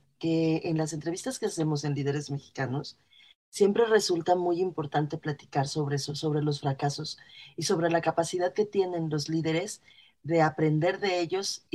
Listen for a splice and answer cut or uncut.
uncut